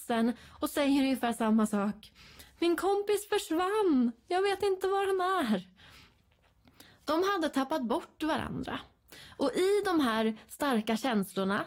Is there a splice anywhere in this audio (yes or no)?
no